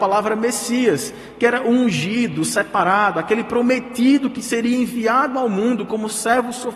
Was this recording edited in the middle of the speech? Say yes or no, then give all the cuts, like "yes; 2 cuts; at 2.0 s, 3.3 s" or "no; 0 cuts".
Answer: no; 0 cuts